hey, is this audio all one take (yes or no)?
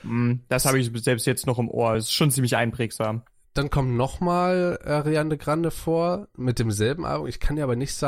yes